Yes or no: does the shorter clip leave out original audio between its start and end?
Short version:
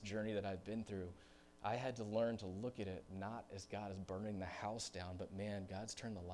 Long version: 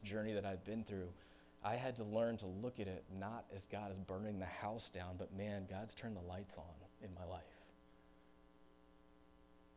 no